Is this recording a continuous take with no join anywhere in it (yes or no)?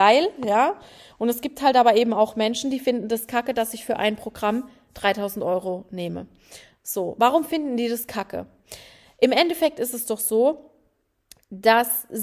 yes